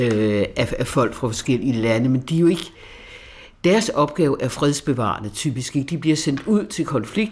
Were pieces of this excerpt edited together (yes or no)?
no